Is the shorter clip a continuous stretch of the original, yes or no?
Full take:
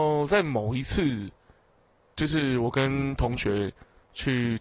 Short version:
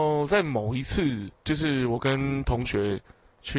no